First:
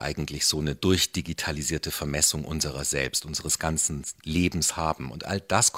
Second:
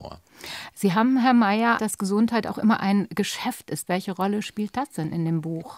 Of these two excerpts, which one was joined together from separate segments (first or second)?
second